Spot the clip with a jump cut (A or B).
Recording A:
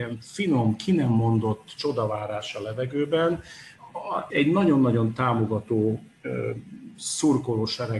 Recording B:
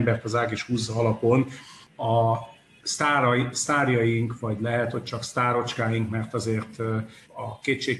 A